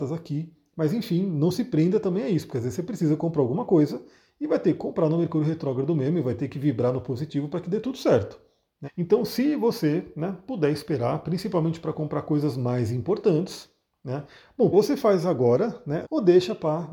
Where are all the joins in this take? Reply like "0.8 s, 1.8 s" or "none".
8.8 s, 14.7 s, 16.0 s